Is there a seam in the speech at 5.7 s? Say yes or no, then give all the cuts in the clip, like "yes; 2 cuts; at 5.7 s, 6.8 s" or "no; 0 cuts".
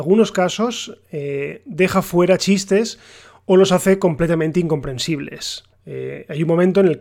yes; 1 cut; at 5.7 s